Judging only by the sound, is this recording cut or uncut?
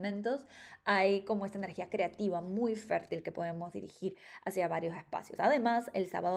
uncut